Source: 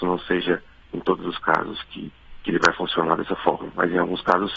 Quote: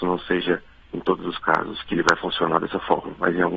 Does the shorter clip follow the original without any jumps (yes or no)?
no